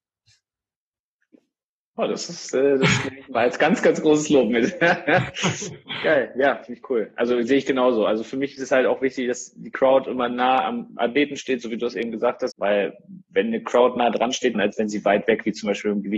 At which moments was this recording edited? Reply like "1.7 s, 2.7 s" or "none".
12.5 s, 14.5 s